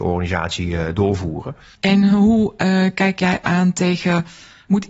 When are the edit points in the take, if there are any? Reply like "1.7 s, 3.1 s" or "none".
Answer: 1.8 s